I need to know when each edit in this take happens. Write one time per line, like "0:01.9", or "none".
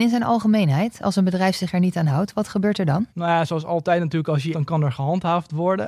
0:03.1
0:04.5

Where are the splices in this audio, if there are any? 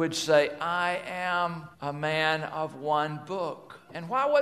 0:01.7

